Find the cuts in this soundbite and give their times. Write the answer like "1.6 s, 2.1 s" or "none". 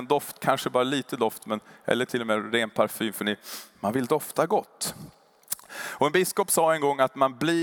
none